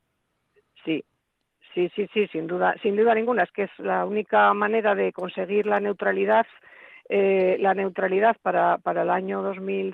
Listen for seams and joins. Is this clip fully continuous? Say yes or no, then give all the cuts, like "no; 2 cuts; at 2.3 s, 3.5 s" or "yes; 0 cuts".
no; 1 cut; at 2.1 s